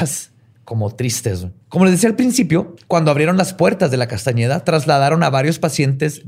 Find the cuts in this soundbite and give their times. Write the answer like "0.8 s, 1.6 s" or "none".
1.6 s